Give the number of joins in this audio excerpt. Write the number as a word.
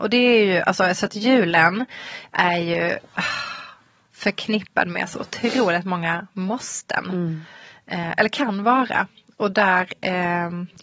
zero